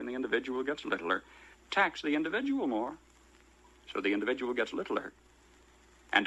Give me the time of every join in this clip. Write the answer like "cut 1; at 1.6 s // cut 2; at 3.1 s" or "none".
cut 1; at 1.5 s

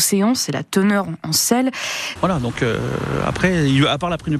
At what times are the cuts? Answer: cut 1; at 2.2 s

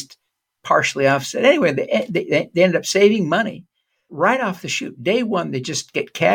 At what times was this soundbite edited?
cut 1; at 4.1 s

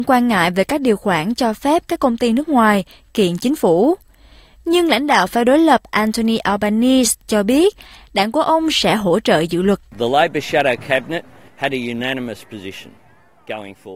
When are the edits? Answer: cut 1; at 11.5 s

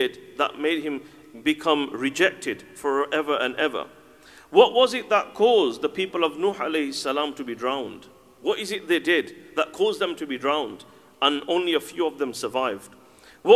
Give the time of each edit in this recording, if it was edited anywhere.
none

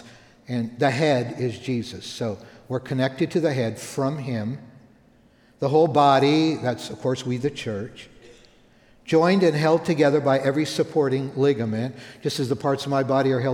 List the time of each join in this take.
none

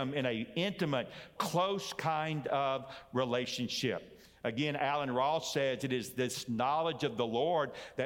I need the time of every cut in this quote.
cut 1; at 1.4 s

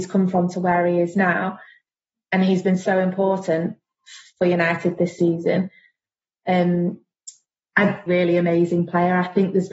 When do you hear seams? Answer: cut 1; at 8.1 s

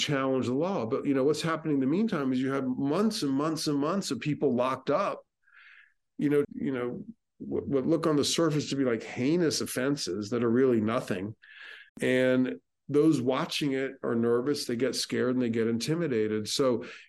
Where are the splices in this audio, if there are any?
cut 1; at 6.4 s // cut 2; at 11.9 s

